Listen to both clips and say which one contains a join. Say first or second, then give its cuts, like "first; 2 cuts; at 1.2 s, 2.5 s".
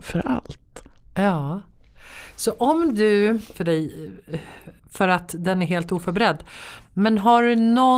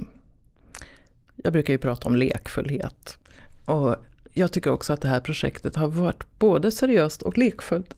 first; 2 cuts; at 3.5 s, 4.8 s